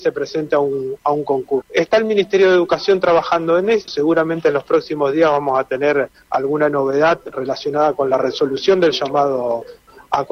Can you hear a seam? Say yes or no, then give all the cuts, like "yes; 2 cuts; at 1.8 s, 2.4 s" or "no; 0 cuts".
yes; 2 cuts; at 1.6 s, 3.9 s